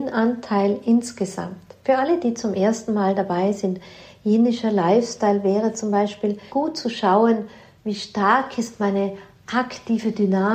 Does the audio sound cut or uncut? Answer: cut